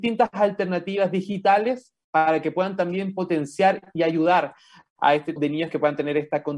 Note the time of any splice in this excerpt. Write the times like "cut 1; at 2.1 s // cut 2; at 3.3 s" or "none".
cut 1; at 5.4 s